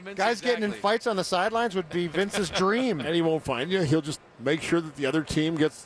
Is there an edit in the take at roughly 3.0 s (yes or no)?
no